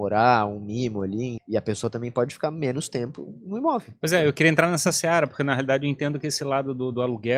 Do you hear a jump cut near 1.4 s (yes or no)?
yes